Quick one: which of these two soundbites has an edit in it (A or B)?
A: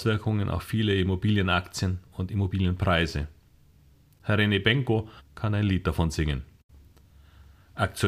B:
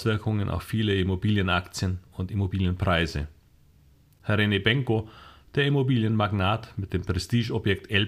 A